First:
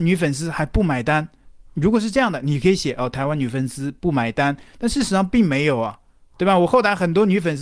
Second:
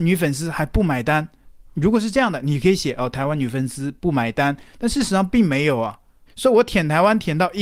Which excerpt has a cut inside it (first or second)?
second